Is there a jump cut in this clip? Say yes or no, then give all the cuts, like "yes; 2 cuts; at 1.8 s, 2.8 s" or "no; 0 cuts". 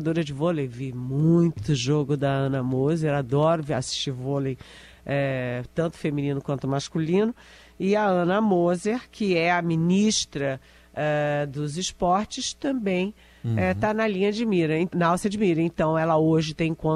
yes; 1 cut; at 14.9 s